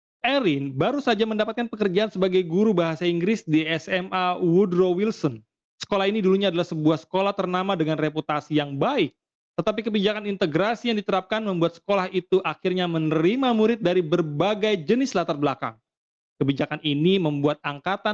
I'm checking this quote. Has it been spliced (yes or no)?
no